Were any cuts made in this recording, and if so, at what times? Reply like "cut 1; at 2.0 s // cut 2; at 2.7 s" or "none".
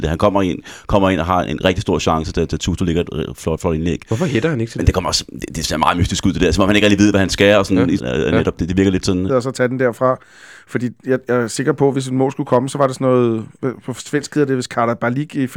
cut 1; at 8.0 s // cut 2; at 9.3 s